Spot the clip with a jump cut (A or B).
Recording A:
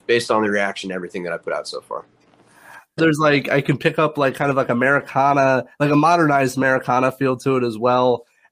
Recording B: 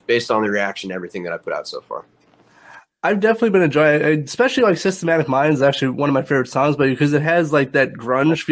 A